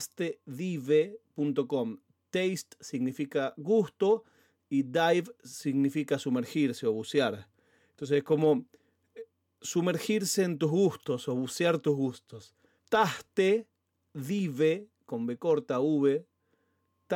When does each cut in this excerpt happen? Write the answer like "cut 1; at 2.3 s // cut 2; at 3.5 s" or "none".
cut 1; at 12.8 s